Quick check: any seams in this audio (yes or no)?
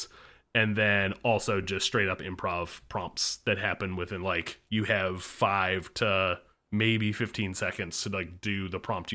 no